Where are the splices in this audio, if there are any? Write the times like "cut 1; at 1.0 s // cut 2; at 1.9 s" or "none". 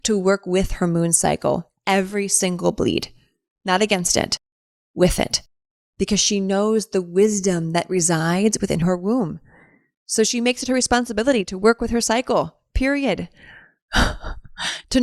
none